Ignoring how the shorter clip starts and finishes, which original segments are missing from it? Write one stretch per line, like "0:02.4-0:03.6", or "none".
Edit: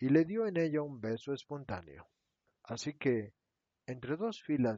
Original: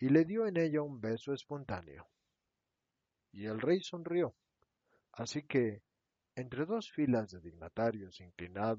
0:02.5-0:05.0